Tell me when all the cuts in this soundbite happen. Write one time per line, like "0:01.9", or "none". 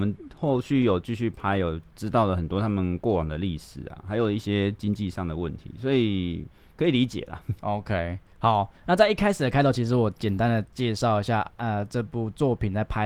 none